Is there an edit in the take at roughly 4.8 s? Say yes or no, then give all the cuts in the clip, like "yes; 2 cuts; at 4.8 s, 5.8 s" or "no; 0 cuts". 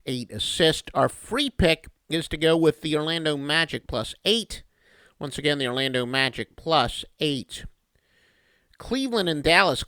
no; 0 cuts